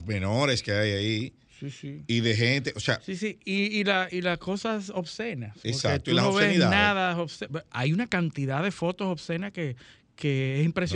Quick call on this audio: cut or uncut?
uncut